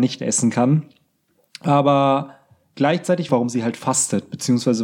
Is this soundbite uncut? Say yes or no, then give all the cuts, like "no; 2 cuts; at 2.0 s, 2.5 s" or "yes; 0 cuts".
no; 1 cut; at 3.3 s